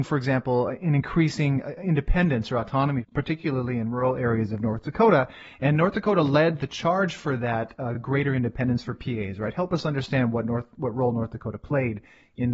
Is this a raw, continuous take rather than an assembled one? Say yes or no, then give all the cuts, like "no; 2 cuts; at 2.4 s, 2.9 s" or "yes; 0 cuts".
yes; 0 cuts